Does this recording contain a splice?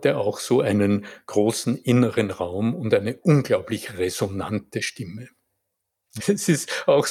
yes; 1 cut; at 6.2 s

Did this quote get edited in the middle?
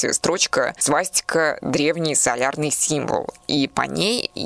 no; 0 cuts

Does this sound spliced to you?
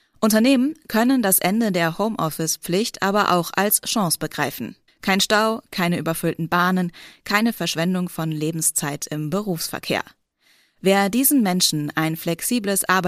yes; 1 cut; at 4.9 s

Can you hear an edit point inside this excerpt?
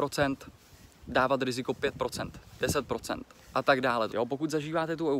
yes; 1 cut; at 4.1 s

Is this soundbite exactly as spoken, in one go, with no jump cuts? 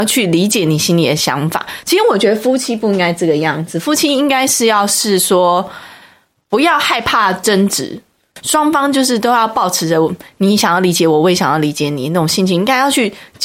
yes; 0 cuts

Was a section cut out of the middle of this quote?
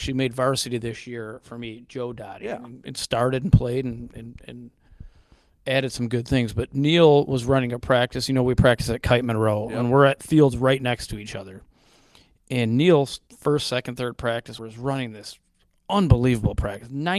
yes; 2 cuts; at 13.3 s, 14.6 s

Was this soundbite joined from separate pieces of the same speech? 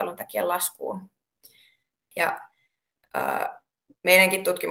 yes; 1 cut; at 2.1 s

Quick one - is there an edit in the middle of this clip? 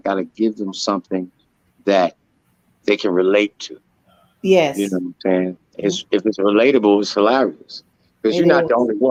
no; 0 cuts

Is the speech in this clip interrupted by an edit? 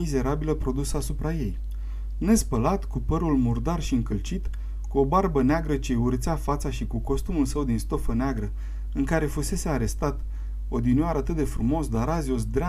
no; 0 cuts

